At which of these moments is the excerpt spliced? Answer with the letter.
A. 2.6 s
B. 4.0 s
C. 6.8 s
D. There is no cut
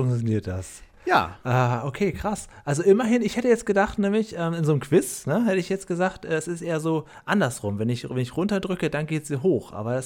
D